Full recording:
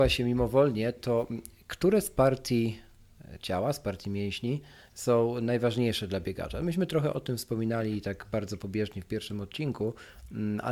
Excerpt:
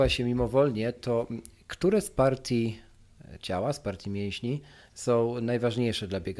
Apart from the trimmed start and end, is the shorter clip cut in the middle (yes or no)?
no